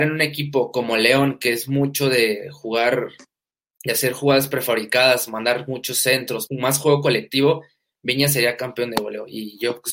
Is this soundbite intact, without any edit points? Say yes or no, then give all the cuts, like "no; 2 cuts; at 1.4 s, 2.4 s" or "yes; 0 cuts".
no; 1 cut; at 6.5 s